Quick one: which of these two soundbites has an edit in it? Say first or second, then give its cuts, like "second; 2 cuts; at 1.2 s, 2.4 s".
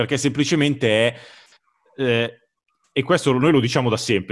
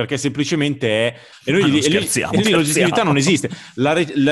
second; 2 cuts; at 1.3 s, 2.4 s